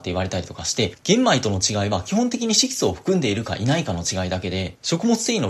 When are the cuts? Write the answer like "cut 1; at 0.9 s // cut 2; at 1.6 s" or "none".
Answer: cut 1; at 0.9 s

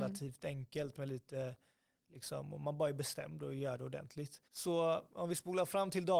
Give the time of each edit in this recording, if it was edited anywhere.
cut 1; at 4.4 s

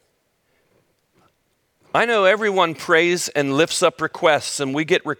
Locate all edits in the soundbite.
none

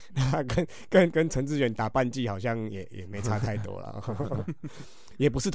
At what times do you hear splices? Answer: cut 1; at 1.1 s

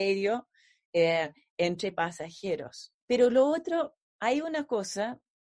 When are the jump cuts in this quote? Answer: cut 1; at 3.0 s

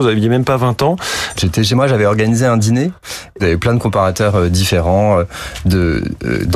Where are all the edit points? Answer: cut 1; at 1.4 s // cut 2; at 3.4 s

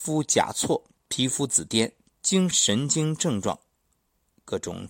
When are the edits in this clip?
cut 1; at 2.5 s

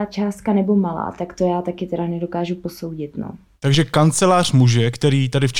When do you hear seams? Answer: none

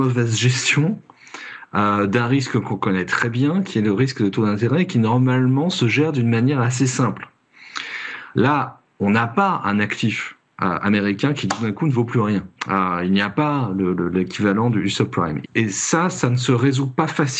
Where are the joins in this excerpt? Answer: cut 1; at 8.3 s // cut 2; at 12.6 s // cut 3; at 15.4 s

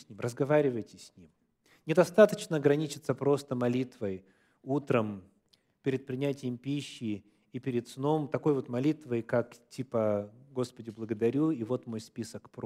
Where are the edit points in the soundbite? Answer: none

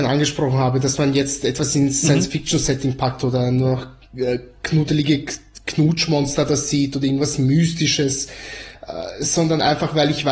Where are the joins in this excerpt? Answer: none

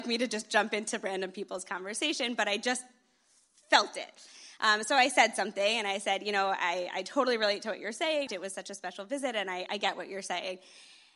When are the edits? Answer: cut 1; at 8.3 s // cut 2; at 9.7 s

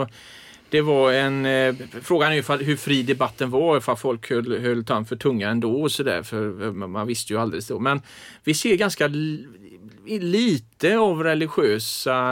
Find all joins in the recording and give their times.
none

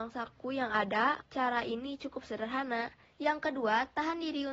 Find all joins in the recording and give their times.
cut 1; at 1.2 s // cut 2; at 3.0 s

